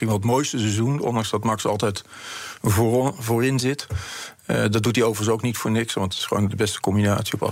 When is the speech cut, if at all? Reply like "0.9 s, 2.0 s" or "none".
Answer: 6.5 s